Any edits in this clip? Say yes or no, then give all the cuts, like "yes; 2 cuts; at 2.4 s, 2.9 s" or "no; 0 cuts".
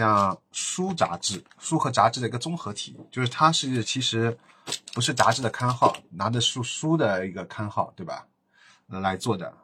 no; 0 cuts